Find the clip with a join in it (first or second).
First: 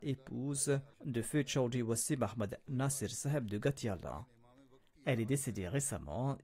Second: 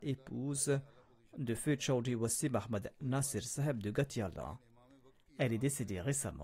first